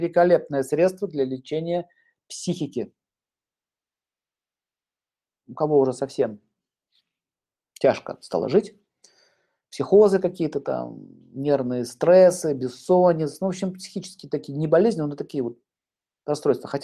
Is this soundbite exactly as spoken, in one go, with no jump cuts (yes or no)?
yes